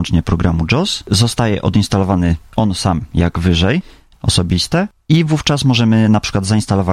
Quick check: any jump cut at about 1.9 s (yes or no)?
no